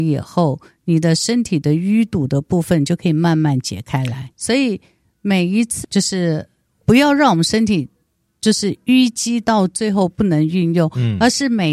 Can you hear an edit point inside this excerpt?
yes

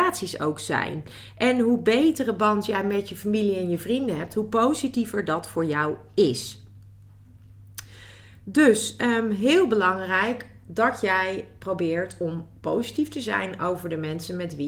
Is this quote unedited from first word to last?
yes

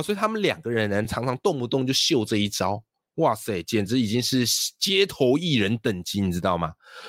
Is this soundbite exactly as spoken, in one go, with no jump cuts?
yes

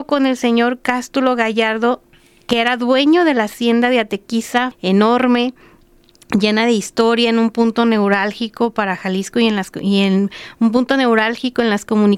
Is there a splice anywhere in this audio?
yes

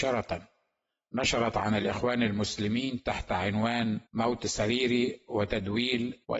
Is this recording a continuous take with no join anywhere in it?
no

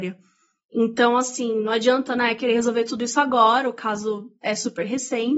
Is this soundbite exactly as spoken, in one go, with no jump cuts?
yes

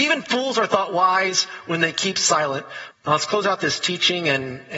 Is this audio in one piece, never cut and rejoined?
no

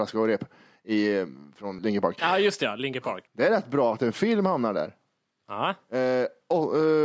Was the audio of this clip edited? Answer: yes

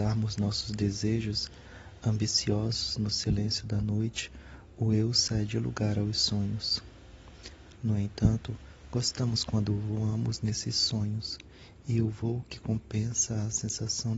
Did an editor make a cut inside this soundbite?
yes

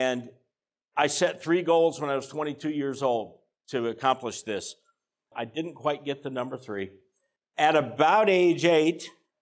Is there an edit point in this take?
yes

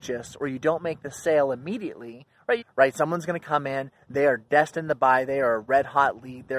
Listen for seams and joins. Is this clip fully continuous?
no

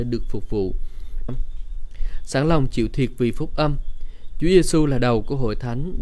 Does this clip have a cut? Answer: yes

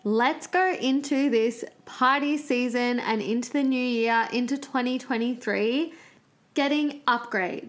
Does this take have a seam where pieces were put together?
no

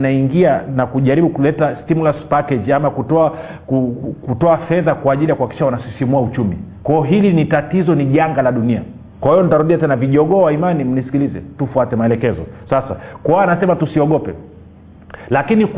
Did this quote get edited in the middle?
yes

